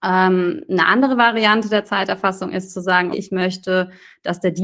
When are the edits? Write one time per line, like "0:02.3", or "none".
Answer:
0:03.1